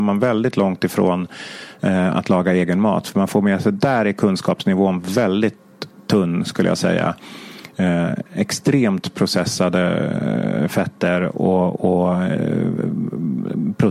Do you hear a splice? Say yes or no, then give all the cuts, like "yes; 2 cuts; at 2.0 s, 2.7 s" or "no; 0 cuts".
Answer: no; 0 cuts